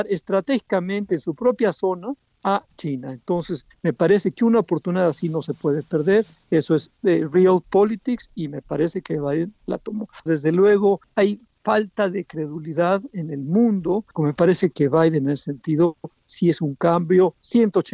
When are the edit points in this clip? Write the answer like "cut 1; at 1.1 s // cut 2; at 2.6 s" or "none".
cut 1; at 10.3 s // cut 2; at 14.1 s